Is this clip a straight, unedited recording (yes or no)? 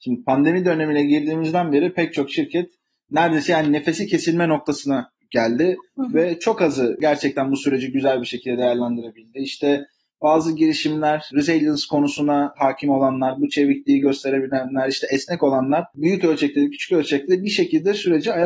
yes